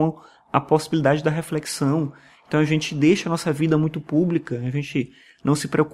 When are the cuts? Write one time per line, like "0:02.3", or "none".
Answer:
none